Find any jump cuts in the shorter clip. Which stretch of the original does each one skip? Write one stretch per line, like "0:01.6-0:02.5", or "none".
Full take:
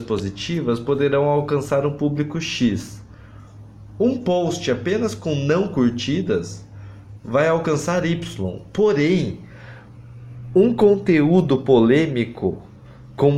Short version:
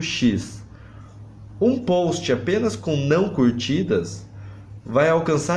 none